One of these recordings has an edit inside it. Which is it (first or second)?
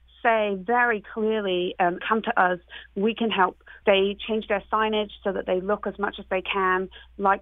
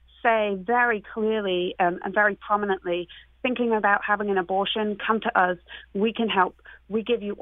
first